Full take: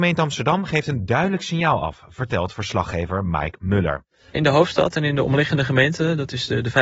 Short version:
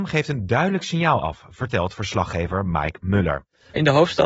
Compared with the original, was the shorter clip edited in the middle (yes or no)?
no